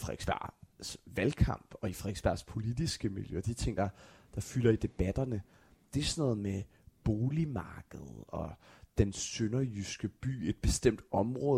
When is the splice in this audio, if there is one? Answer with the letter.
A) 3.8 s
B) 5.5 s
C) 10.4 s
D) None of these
D